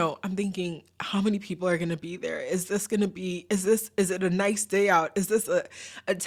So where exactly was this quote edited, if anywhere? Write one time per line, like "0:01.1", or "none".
none